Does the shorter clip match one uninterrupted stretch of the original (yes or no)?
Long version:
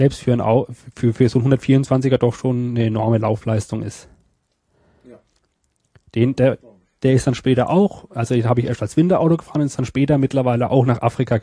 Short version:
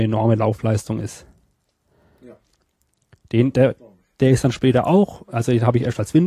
yes